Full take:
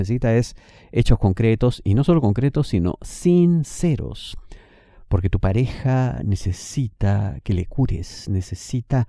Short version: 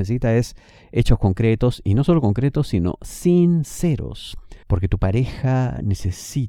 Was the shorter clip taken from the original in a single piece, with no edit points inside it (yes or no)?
no